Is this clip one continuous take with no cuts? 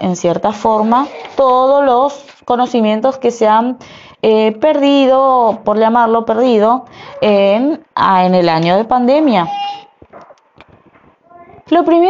no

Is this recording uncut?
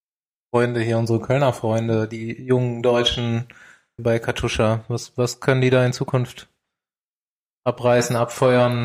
no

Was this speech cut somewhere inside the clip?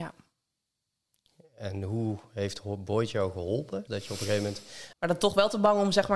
yes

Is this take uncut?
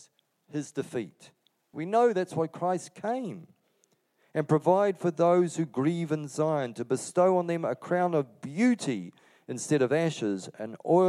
no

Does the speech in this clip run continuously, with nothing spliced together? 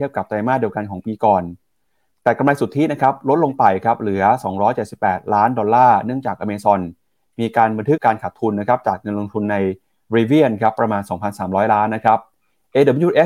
no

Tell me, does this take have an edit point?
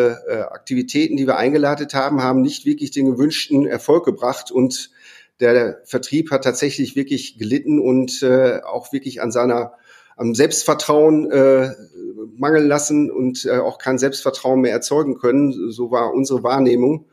no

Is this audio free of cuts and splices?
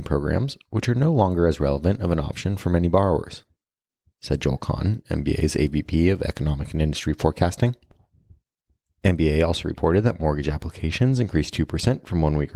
yes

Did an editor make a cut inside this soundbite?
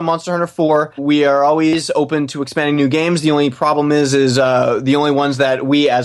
yes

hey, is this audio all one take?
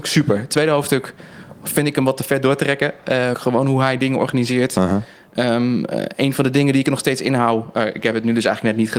no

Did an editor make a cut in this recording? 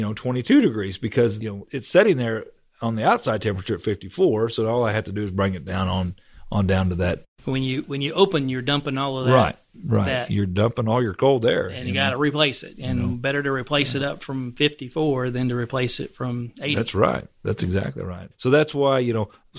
no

